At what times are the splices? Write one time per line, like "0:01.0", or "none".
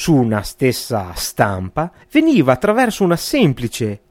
0:02.0